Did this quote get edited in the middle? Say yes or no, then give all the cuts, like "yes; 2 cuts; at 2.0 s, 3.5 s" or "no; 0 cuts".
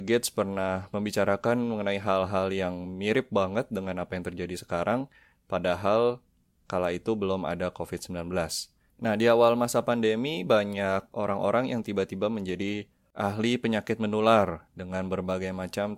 yes; 1 cut; at 8.9 s